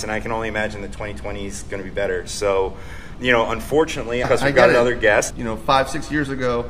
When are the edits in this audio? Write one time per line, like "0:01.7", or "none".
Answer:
0:03.1
0:04.2
0:05.3